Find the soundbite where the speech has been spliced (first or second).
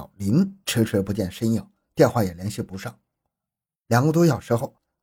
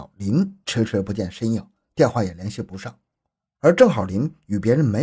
second